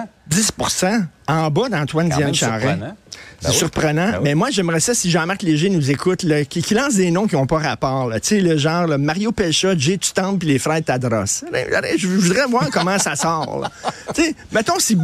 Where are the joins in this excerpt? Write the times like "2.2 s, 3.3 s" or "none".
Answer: none